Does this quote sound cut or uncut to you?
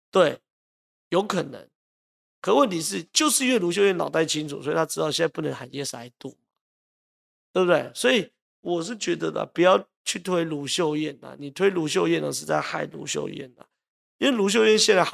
uncut